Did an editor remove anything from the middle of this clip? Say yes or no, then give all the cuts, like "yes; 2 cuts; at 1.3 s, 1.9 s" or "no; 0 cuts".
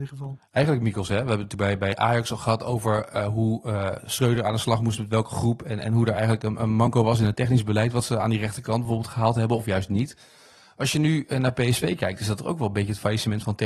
no; 0 cuts